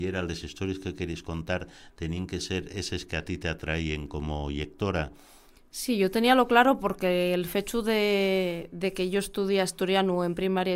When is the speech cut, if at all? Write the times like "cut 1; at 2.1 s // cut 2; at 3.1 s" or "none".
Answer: none